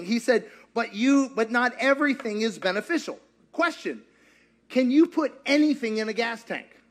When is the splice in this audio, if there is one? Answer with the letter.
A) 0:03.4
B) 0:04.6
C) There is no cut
C